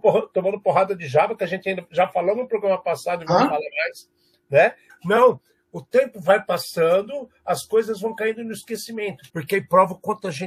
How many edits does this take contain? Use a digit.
2